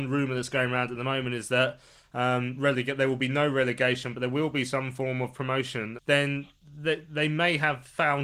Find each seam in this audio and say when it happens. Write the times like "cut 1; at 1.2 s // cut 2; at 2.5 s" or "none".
cut 1; at 6.0 s